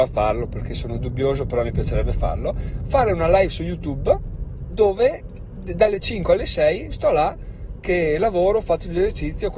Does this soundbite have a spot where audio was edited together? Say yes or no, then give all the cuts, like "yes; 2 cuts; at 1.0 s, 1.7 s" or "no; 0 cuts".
no; 0 cuts